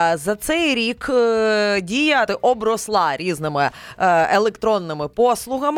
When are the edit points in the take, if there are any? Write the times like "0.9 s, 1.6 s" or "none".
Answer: 2.3 s